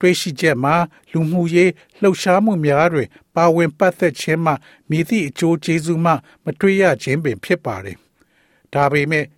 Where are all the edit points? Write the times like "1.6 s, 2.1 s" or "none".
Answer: none